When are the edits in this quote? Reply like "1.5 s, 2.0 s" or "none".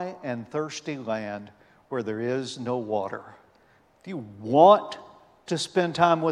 3.9 s